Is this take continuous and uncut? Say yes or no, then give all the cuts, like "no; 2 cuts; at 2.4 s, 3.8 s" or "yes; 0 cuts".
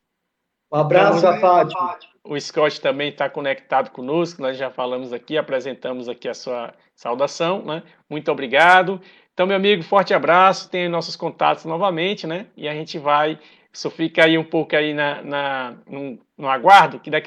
no; 1 cut; at 1.2 s